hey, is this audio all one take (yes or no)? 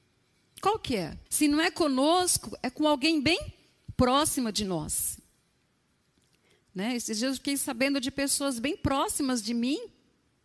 no